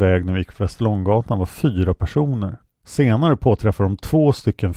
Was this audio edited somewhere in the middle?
yes; 1 cut; at 2.7 s

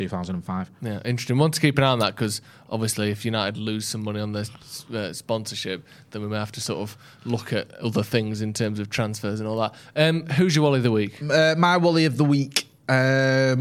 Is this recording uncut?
yes; 0 cuts

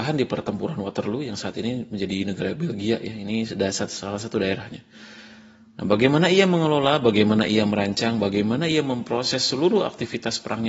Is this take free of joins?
yes; 0 cuts

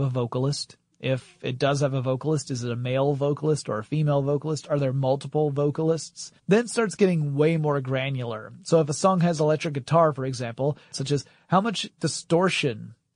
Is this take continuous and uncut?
no; 2 cuts; at 6.4 s, 10.9 s

